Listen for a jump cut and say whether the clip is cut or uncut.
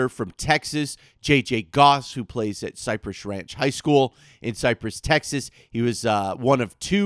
uncut